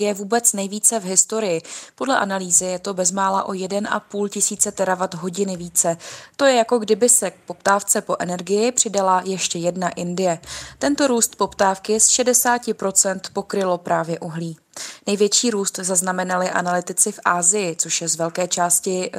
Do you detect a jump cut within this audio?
no; 0 cuts

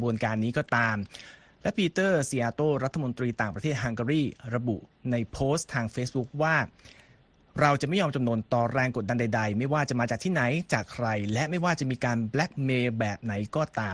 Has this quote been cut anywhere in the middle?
no; 0 cuts

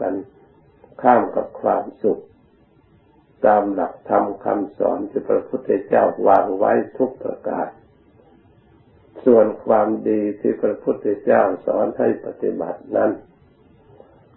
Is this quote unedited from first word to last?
yes; 0 cuts

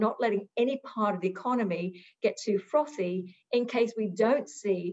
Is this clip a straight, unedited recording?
yes; 0 cuts

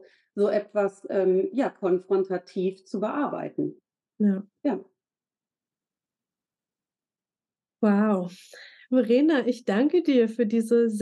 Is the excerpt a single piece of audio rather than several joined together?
yes; 0 cuts

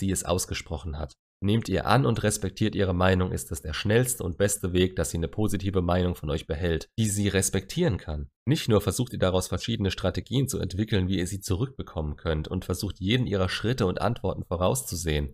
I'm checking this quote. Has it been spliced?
yes; 1 cut; at 8.4 s

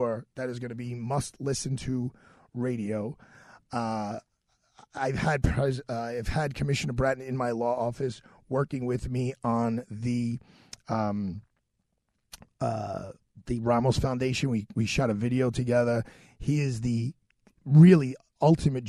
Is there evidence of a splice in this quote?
no; 0 cuts

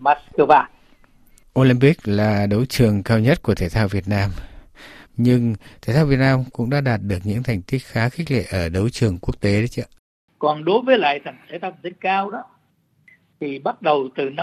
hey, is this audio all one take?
no; 1 cut; at 5.1 s

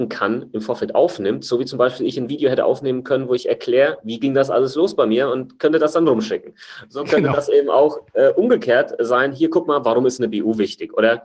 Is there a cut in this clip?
no; 0 cuts

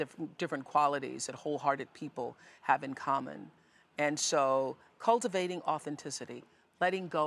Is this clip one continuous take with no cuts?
yes; 0 cuts

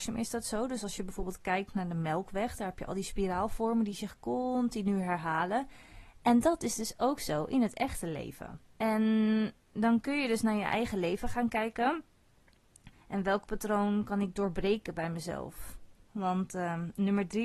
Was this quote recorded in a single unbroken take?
no; 3 cuts; at 8.7 s, 12.9 s, 16.1 s

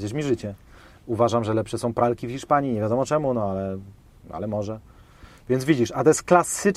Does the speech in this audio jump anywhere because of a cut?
no; 0 cuts

